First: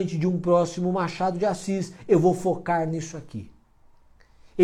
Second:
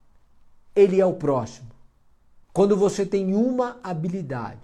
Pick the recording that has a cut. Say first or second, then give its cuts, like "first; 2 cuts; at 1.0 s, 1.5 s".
second; 1 cut; at 2.4 s